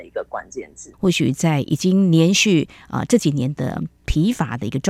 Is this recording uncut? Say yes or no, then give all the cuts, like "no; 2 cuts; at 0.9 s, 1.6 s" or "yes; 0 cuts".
no; 1 cut; at 0.9 s